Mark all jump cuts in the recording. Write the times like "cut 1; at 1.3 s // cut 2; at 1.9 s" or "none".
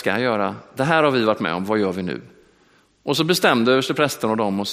none